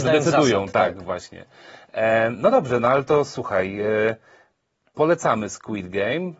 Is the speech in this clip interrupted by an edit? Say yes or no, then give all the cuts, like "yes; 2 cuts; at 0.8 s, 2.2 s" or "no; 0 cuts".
no; 0 cuts